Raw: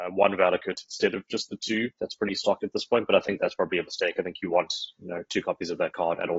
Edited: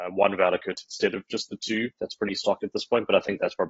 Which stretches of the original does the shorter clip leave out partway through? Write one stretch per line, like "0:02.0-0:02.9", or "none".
none

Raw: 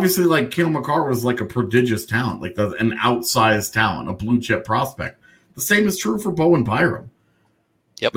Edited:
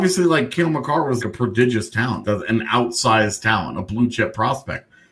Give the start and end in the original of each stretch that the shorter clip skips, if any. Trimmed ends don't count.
0:01.2-0:01.4
0:02.4-0:02.5

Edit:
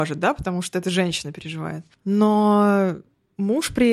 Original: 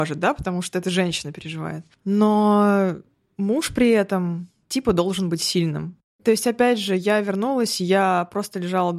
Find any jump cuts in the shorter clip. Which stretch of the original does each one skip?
none

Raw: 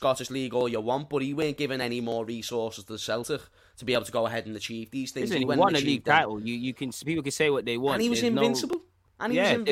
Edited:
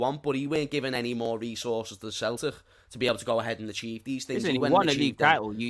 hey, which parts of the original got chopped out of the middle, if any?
none

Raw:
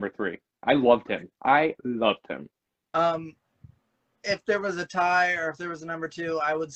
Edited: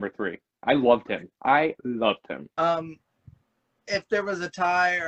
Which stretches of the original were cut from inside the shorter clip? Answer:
0:02.5-0:02.9

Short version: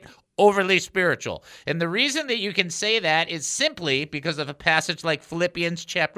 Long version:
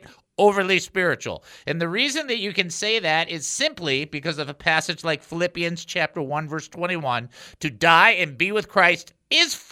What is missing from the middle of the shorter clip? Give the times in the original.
none

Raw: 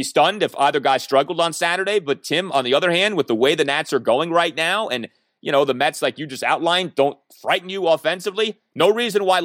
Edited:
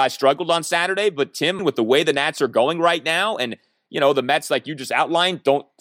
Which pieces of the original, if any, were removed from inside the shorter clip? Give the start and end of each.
0:02.5-0:03.1

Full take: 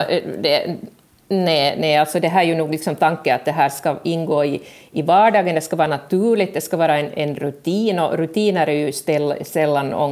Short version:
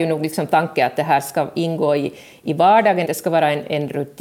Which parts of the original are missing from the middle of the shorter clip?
0:05.5-0:06.5

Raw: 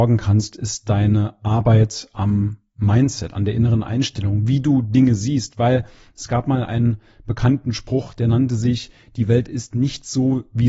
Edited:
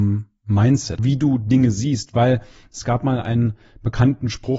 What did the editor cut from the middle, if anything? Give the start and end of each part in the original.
0:03.3-0:04.4

